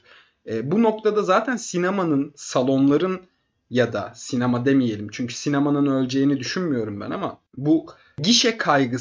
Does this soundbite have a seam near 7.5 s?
yes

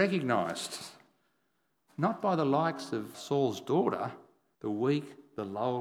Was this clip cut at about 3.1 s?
yes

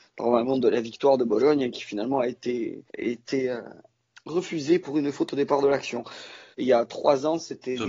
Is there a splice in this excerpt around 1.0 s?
no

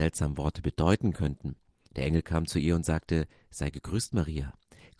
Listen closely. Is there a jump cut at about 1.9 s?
yes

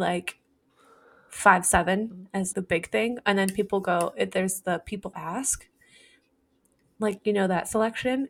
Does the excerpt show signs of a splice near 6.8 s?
no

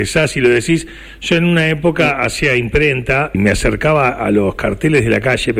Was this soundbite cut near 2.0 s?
no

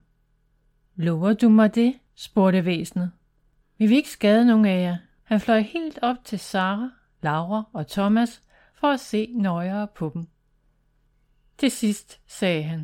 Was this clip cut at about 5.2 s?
yes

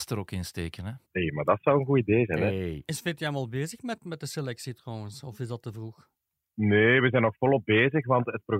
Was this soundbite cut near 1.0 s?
yes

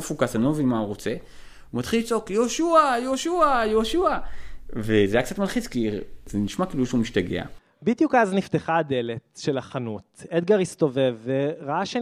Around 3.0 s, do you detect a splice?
no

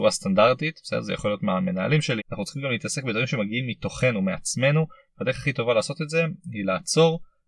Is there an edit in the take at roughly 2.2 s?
yes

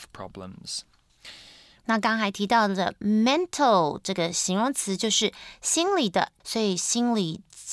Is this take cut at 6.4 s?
yes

